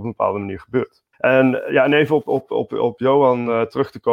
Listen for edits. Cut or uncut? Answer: cut